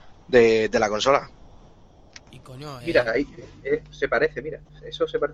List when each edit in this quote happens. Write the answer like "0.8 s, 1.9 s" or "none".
2.8 s, 3.8 s